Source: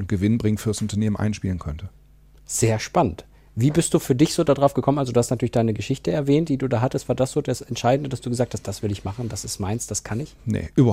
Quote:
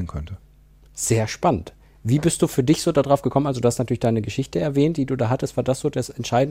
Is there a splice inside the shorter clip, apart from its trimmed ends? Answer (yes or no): no